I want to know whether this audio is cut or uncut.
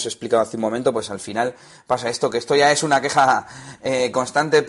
uncut